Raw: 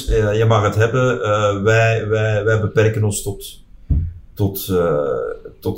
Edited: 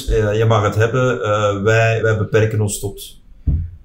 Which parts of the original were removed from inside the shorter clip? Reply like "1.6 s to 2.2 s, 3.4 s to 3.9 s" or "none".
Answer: 2.0 s to 2.4 s